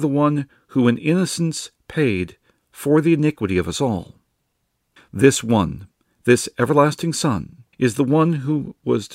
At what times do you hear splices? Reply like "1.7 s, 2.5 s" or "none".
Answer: 5.0 s, 7.7 s

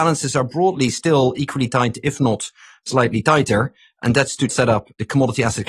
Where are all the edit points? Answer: 4.5 s

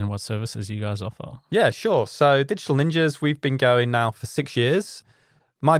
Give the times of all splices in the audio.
none

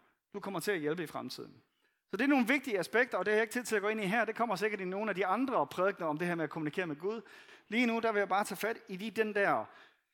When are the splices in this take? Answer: none

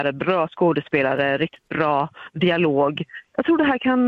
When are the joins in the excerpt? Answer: none

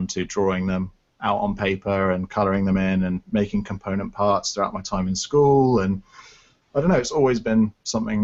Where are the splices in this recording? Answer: none

